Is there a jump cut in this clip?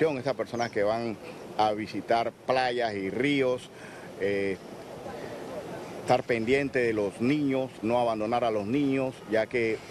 yes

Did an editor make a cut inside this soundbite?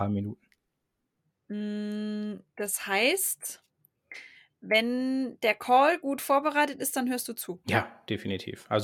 no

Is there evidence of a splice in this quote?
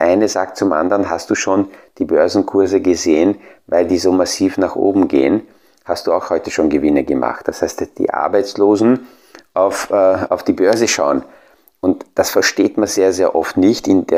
no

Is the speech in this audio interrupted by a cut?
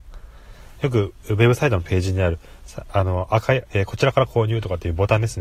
yes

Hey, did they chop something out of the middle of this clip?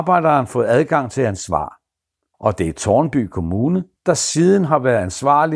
yes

